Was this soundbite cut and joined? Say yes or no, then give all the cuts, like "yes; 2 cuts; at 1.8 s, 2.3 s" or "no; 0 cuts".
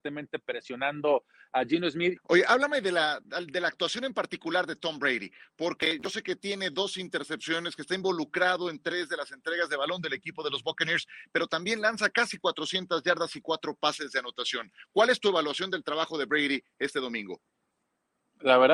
yes; 1 cut; at 2.2 s